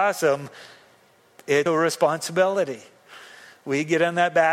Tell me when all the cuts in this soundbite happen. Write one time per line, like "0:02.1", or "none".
0:01.7